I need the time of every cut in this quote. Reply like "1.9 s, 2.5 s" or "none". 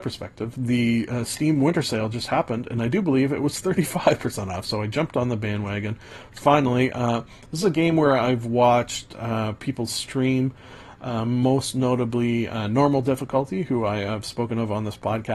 4.6 s